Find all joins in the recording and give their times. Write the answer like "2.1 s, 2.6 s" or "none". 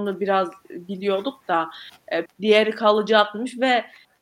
2.3 s

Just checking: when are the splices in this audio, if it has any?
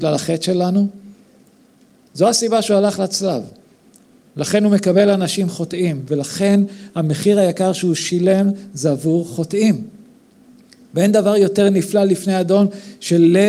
none

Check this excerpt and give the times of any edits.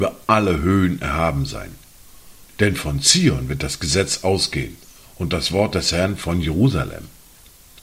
2.5 s

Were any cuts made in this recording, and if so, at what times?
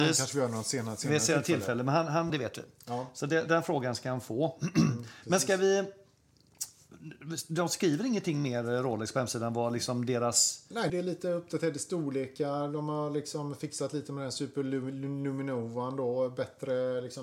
2.3 s, 10.9 s

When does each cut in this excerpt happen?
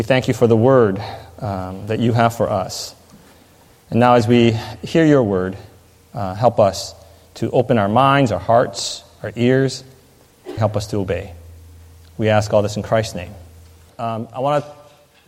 10.6 s, 13.9 s

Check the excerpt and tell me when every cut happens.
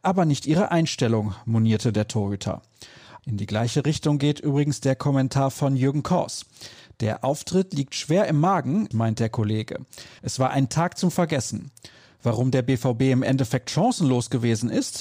3.2 s, 8.9 s, 10.2 s

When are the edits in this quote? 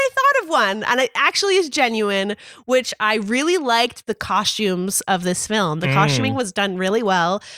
none

